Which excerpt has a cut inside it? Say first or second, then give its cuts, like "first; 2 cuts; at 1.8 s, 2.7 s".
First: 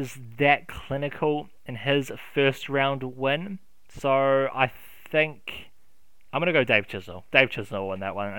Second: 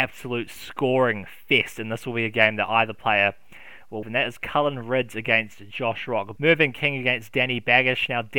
second; 2 cuts; at 4.0 s, 6.4 s